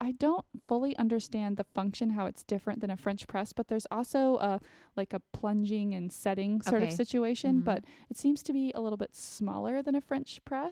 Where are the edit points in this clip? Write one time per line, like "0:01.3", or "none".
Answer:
none